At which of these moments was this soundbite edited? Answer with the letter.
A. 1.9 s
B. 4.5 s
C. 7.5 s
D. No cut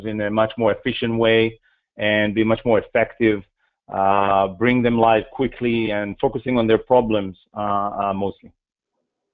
D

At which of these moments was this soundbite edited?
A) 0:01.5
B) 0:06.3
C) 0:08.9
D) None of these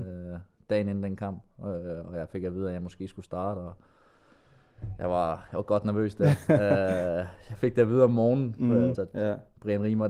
C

